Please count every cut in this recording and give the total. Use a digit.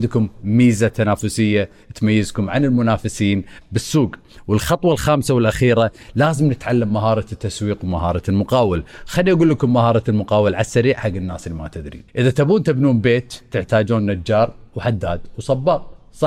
1